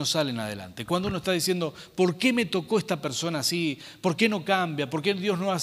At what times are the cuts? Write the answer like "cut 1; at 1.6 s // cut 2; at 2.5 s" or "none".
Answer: none

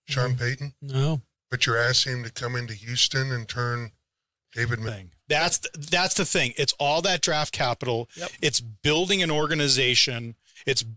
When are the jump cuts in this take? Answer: cut 1; at 4.9 s

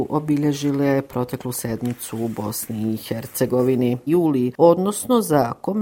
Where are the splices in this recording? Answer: cut 1; at 4.1 s

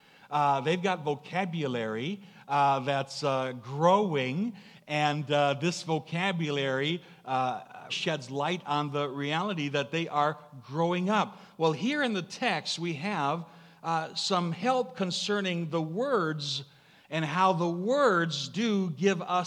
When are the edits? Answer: cut 1; at 7.9 s

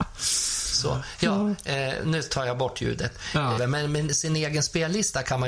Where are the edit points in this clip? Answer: cut 1; at 3.6 s

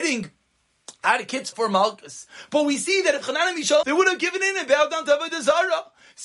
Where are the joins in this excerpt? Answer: cut 1; at 1.5 s // cut 2; at 3.8 s

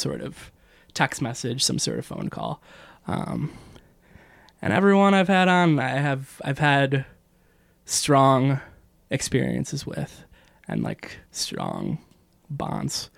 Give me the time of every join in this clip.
cut 1; at 11.3 s

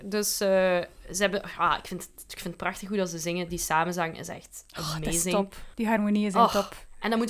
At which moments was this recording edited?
cut 1; at 5.7 s

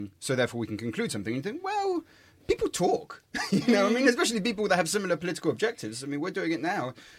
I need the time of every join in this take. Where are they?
none

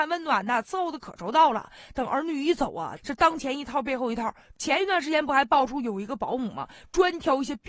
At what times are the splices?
cut 1; at 3.0 s

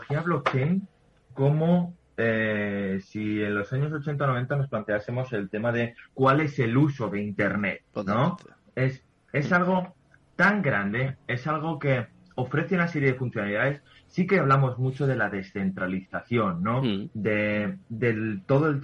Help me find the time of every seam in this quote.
none

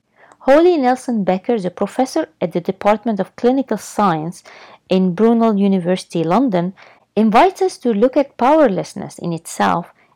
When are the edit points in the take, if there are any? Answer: none

